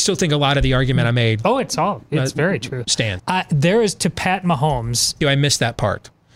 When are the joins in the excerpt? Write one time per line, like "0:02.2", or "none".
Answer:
0:03.2
0:05.2